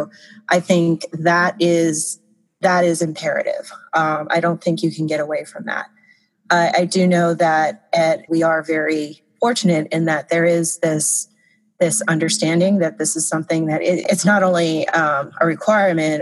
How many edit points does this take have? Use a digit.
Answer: 1